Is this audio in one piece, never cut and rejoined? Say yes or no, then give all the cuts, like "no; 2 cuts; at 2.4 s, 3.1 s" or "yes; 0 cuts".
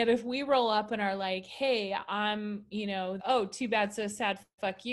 no; 1 cut; at 3.2 s